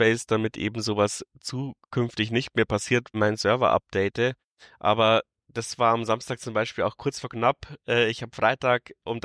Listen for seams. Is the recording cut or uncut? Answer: cut